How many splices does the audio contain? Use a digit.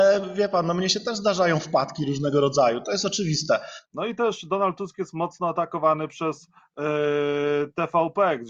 1